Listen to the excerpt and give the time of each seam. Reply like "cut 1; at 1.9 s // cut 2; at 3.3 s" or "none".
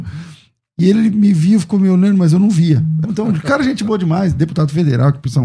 cut 1; at 3.0 s